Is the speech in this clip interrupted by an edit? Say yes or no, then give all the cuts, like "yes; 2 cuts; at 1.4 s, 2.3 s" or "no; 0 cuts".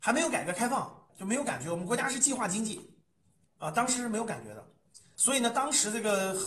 yes; 2 cuts; at 1.1 s, 5.1 s